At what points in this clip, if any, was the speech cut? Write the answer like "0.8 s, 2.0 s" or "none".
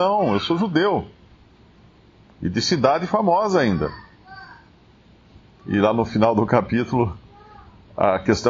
none